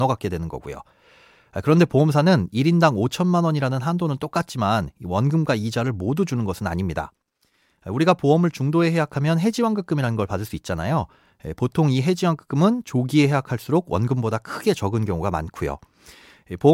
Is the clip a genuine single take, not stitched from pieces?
yes; 0 cuts

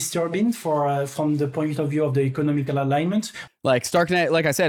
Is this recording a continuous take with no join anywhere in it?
no; 1 cut; at 3.5 s

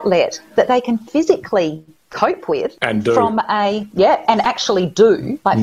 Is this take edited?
no; 0 cuts

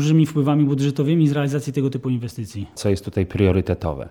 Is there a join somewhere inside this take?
yes; 1 cut; at 2.8 s

